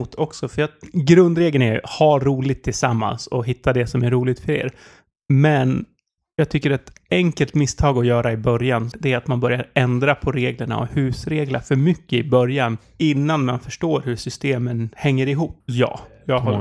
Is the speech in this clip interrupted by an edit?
yes; 2 cuts; at 8.9 s, 15.6 s

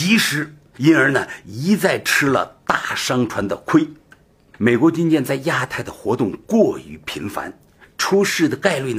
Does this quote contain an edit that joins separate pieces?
yes; 1 cut; at 4.5 s

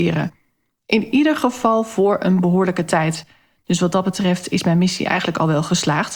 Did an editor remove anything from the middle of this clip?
no; 0 cuts

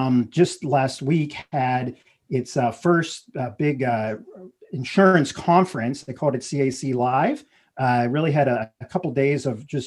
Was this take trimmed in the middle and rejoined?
no; 0 cuts

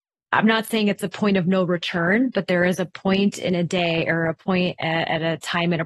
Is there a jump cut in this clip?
no; 0 cuts

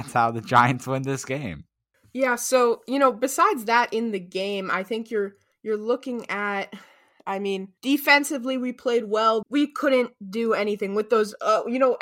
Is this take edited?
yes; 2 cuts; at 7.8 s, 9.4 s

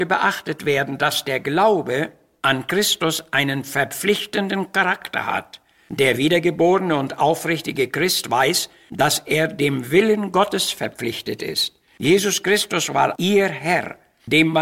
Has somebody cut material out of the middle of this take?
yes; 2 cuts; at 11.9 s, 13.2 s

